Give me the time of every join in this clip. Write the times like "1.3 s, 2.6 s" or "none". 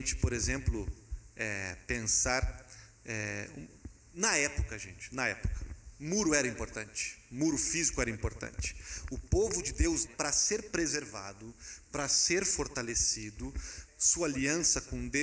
10.1 s, 13.9 s